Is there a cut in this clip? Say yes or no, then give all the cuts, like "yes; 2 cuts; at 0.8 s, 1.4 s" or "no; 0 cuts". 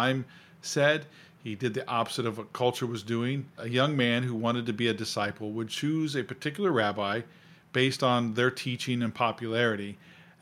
yes; 1 cut; at 3.6 s